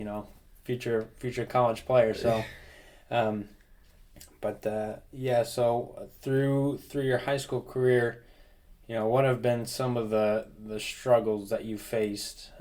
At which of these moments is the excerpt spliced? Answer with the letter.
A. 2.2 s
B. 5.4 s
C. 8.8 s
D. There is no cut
D